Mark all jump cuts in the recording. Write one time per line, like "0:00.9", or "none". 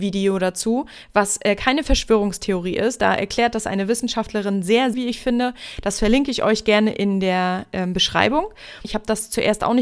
0:04.9
0:08.8